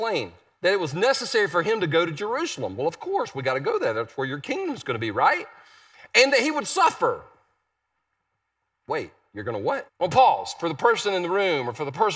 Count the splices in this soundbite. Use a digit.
1